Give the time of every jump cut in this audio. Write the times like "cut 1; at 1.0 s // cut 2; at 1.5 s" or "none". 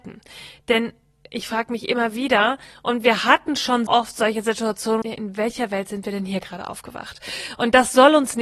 cut 1; at 3.9 s // cut 2; at 5.0 s